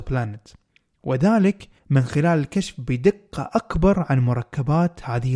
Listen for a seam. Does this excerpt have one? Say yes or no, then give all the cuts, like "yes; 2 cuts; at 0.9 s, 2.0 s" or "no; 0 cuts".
yes; 1 cut; at 1.8 s